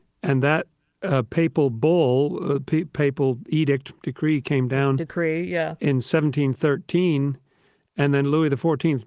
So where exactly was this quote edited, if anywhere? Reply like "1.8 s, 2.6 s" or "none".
none